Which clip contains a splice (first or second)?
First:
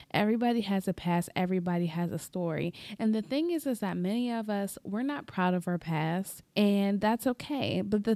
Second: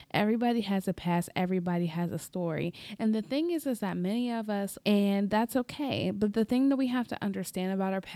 second